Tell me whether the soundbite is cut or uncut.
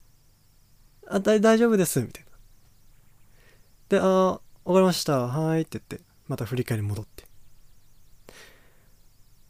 uncut